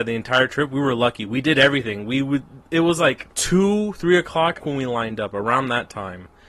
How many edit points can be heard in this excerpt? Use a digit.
2